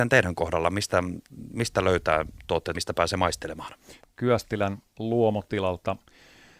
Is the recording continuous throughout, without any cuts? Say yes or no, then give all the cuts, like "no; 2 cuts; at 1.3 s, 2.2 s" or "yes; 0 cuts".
no; 2 cuts; at 2.7 s, 4.0 s